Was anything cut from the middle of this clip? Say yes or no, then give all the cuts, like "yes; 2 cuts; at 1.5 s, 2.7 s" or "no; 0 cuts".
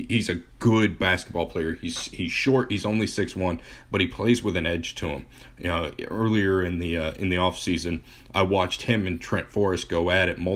no; 0 cuts